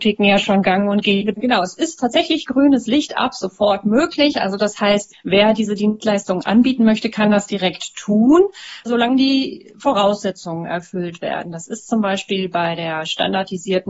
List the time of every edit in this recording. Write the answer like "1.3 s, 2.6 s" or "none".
1.3 s